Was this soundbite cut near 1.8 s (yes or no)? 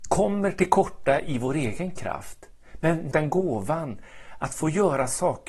no